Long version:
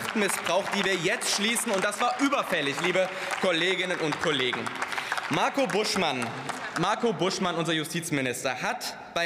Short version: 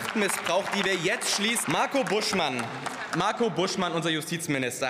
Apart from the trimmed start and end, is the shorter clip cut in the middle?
yes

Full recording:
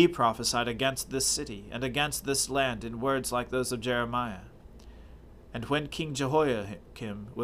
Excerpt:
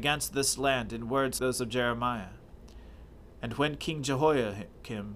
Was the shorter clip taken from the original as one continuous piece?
no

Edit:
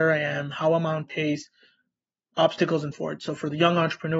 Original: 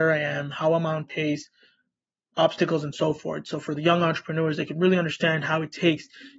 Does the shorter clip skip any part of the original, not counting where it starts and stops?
yes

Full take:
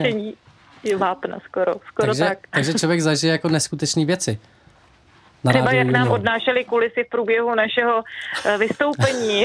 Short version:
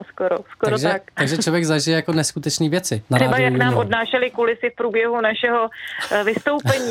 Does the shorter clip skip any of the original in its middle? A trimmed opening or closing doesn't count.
yes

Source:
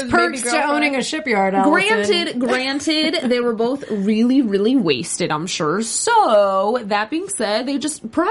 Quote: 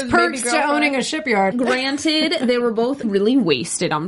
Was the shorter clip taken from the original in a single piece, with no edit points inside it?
no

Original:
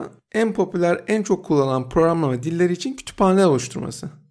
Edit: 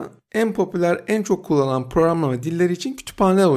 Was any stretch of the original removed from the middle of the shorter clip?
no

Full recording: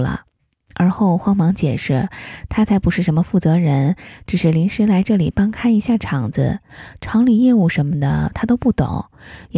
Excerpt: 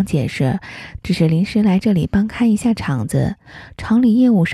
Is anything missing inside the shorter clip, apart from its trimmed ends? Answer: yes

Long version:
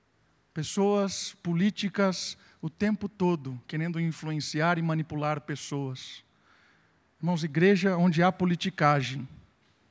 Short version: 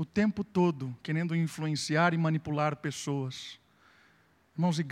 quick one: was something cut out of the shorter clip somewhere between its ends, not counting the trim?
no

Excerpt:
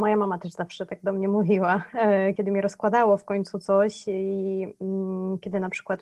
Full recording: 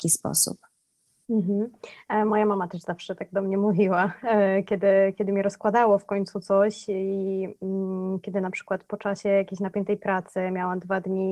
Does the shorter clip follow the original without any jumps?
no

